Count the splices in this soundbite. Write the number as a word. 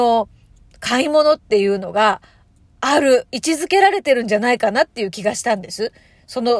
zero